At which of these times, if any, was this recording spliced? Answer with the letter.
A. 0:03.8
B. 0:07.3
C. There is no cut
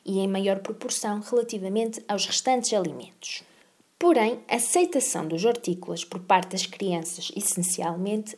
C